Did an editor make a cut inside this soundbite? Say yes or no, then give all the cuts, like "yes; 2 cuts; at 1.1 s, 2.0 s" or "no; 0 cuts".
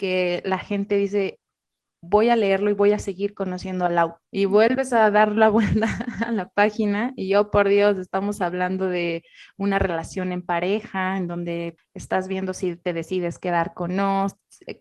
yes; 2 cuts; at 4.2 s, 11.8 s